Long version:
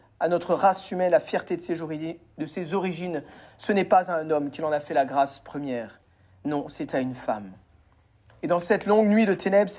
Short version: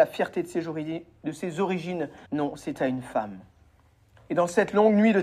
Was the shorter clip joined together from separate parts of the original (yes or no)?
yes